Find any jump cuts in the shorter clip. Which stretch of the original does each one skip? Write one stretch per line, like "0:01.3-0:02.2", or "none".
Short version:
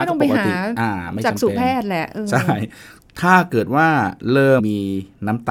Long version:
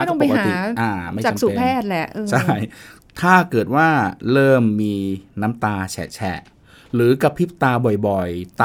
0:04.6-0:04.7